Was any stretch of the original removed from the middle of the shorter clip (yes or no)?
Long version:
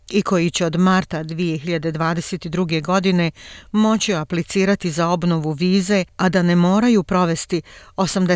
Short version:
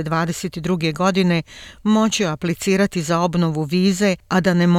no